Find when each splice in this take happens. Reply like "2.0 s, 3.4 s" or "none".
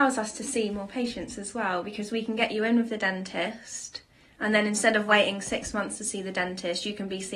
none

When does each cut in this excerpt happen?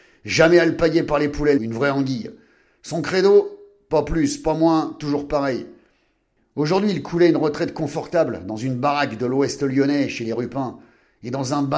1.6 s

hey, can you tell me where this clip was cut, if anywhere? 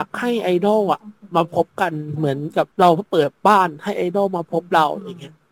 2.7 s

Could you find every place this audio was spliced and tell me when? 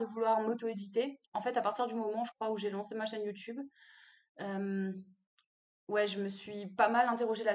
1.3 s

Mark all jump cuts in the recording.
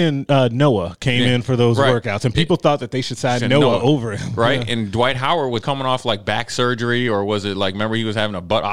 5.6 s

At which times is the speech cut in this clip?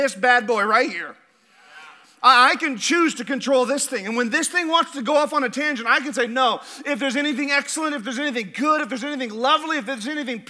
none

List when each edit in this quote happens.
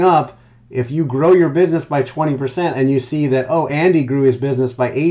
none

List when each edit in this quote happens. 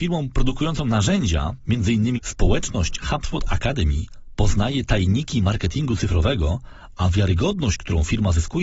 2.1 s

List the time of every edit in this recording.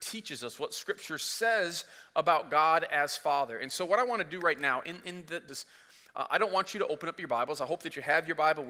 5.5 s

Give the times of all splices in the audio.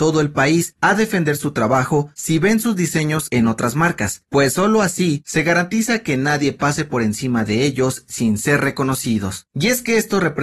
9.5 s

